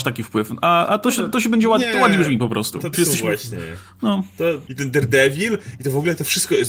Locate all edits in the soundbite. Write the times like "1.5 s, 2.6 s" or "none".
2.9 s, 4.7 s